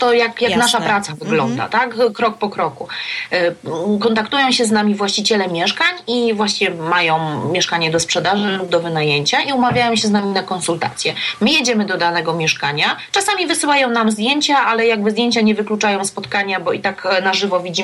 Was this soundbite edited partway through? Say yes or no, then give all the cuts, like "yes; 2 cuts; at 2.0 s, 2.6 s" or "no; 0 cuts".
no; 0 cuts